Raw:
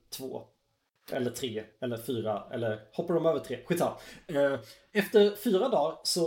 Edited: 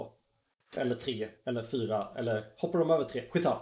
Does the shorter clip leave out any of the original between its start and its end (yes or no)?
no